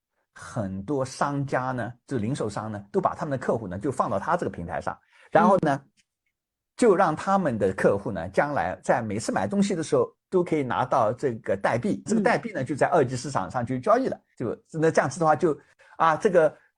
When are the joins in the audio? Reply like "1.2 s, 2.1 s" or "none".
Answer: 12.1 s, 14.3 s

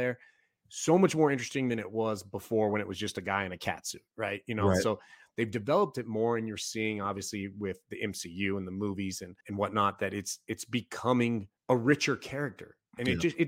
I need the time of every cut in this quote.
9.4 s, 11.6 s

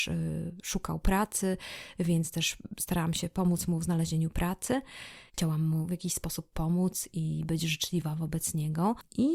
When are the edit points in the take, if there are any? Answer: 5.3 s

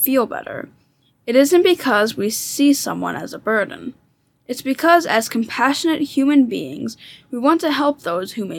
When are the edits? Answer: none

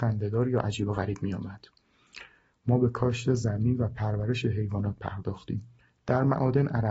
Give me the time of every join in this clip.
none

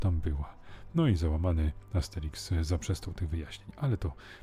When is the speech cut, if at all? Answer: none

